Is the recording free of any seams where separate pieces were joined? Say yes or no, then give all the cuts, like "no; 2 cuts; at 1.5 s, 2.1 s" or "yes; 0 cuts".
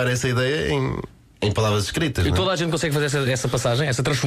yes; 0 cuts